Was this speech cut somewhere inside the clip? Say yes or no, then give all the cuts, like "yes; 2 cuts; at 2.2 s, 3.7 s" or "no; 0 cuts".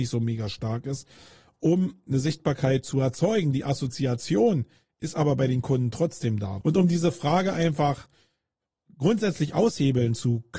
yes; 1 cut; at 6.6 s